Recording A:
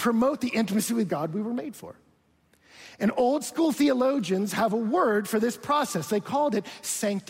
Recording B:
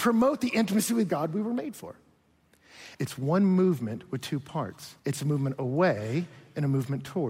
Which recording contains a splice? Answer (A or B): B